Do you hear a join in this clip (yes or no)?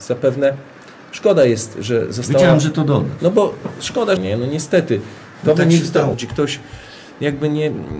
yes